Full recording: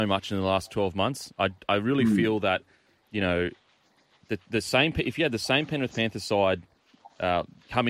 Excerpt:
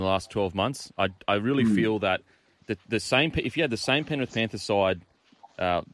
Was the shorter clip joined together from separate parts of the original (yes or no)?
yes